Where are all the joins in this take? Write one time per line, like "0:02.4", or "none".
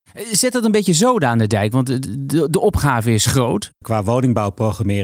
0:03.8